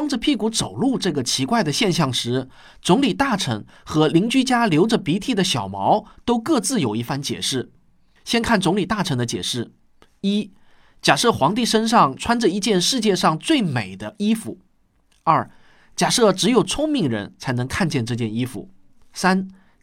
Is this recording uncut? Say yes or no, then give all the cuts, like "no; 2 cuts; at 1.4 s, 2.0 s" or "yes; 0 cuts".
yes; 0 cuts